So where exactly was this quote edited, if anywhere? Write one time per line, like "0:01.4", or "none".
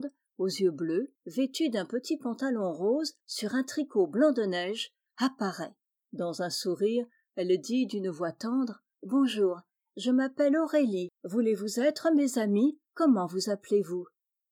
0:12.9